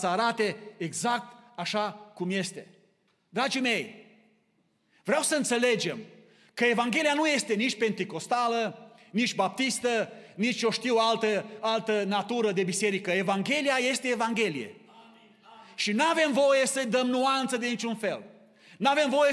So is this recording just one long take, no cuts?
yes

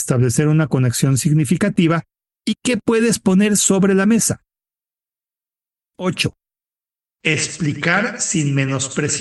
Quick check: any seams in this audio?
no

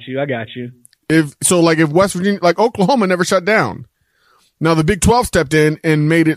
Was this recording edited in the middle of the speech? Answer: no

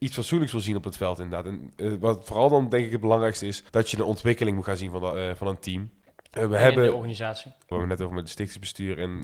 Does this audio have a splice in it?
yes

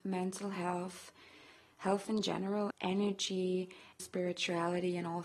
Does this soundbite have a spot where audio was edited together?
yes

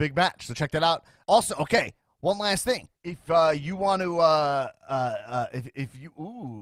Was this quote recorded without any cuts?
no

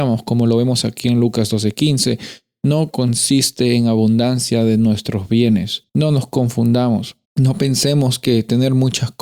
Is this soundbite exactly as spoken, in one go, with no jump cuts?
no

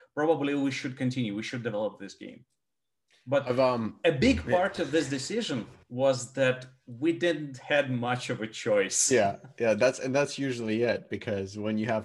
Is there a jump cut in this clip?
no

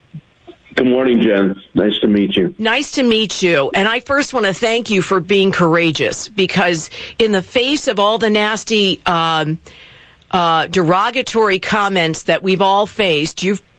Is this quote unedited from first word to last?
yes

